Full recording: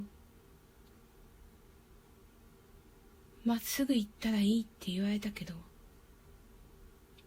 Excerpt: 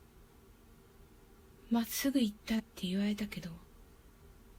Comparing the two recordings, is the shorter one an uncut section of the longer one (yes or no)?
no